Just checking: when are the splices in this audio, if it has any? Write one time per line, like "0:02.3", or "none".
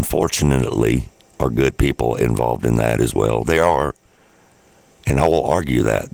none

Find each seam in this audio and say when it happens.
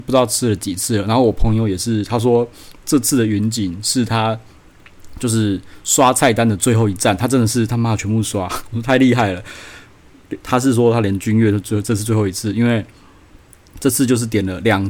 0:10.4

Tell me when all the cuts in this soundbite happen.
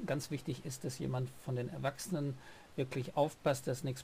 none

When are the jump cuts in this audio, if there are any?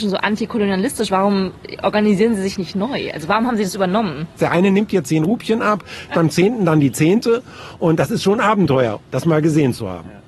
0:04.4
0:06.1

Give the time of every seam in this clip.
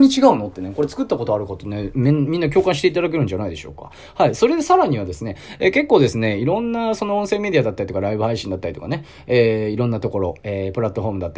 none

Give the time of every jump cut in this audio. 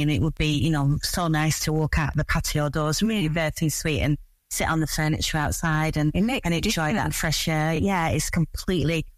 none

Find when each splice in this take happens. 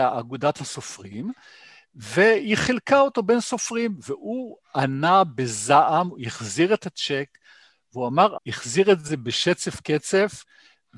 0:08.4

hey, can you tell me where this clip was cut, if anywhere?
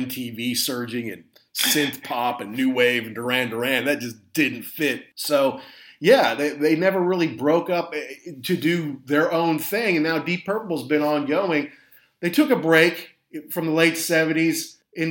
none

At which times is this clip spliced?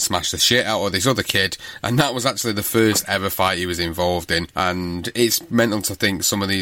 none

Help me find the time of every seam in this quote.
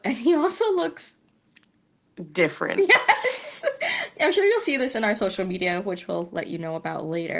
none

